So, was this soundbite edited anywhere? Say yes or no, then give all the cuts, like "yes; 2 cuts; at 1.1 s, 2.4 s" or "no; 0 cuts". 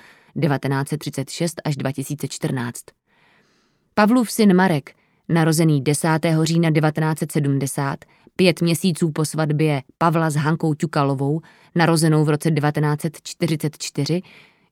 no; 0 cuts